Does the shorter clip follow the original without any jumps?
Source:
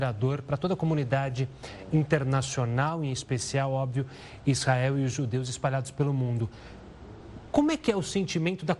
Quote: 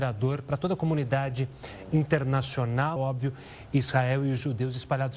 no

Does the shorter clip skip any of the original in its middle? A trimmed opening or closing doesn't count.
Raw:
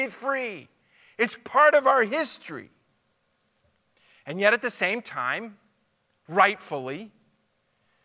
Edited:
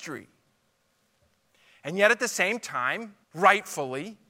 yes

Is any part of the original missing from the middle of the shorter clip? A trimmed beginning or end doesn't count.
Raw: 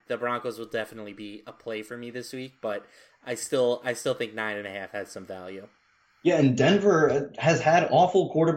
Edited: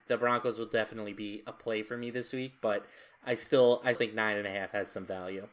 yes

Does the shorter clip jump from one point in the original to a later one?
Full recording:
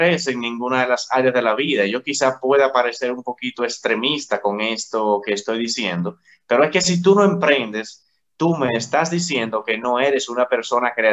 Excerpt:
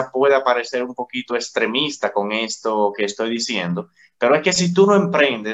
no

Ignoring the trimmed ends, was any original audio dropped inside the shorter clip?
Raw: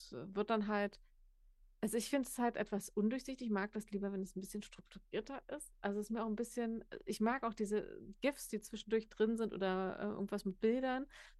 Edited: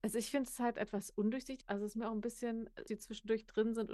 yes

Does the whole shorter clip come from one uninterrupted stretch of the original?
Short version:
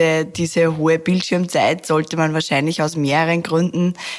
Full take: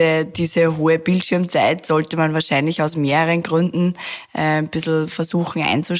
yes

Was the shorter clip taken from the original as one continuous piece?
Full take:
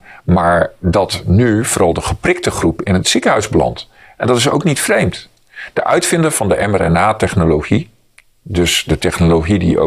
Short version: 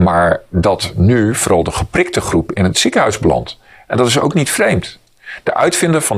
yes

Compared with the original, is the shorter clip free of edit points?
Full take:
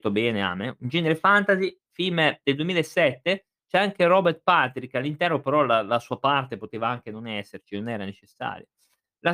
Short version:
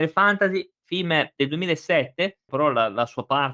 no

